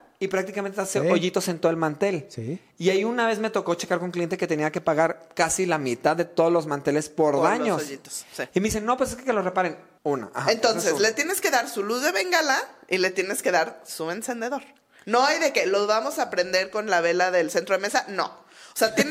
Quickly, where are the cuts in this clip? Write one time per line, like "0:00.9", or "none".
0:10.0